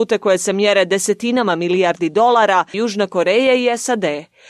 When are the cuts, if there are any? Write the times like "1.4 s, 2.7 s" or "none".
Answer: 2.7 s